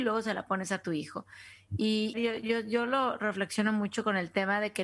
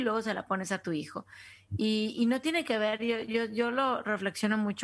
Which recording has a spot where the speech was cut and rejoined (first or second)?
first